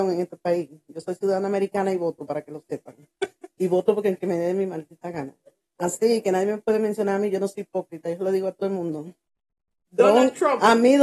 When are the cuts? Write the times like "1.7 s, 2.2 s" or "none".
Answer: none